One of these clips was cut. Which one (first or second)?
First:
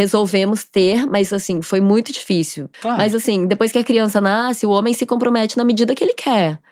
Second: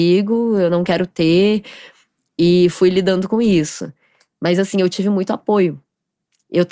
first